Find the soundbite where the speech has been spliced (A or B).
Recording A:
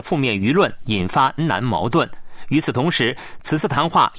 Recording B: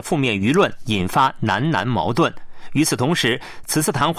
A